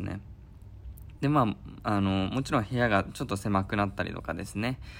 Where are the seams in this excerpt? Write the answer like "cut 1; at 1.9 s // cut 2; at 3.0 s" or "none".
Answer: none

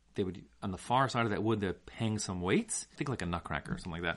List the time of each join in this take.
cut 1; at 3.0 s

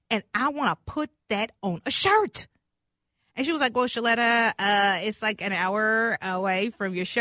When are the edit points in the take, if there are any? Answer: none

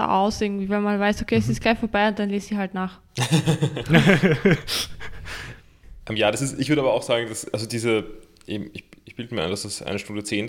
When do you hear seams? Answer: none

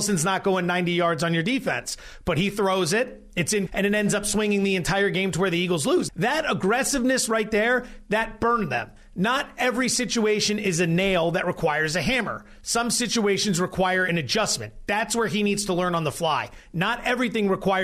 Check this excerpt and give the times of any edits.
cut 1; at 3.7 s // cut 2; at 6.1 s

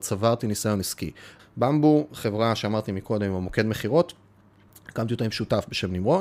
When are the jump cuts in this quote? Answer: cut 1; at 1.4 s

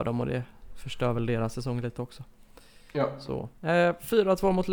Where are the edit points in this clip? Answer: cut 1; at 3.5 s

